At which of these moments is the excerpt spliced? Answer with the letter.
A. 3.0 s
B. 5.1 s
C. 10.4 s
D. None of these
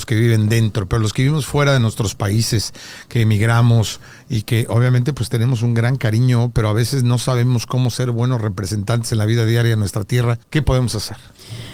C